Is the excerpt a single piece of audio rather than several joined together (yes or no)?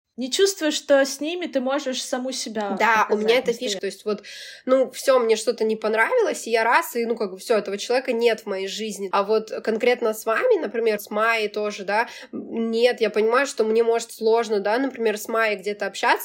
no